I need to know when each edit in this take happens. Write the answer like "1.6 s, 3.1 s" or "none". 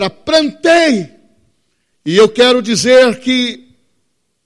1.9 s